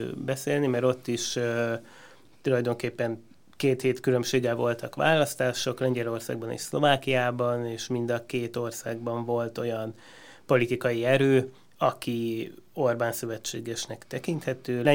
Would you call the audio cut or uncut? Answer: uncut